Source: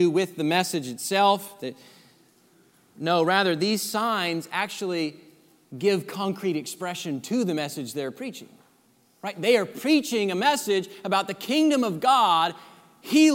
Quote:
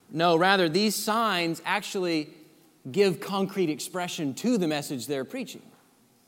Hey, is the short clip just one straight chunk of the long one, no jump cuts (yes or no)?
yes